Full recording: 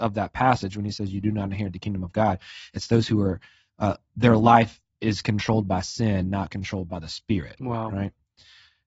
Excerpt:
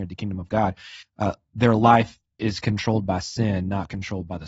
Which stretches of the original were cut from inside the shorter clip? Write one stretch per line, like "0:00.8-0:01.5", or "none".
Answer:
0:02.7-0:03.6